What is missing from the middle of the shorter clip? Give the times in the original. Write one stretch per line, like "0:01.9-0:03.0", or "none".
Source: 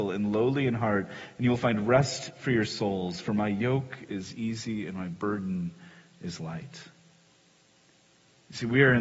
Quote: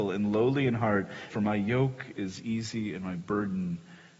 0:01.3-0:03.2